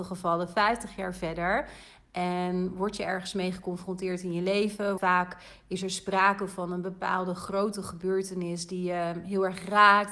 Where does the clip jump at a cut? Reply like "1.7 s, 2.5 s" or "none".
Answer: 5.0 s